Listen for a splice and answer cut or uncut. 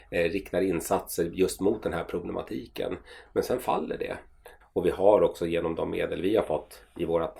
cut